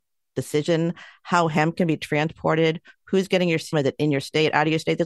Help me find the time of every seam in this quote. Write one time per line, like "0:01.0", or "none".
0:03.7